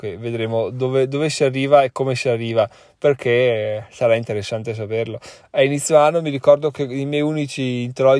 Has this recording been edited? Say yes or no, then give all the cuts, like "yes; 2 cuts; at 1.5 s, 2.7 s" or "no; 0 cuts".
no; 0 cuts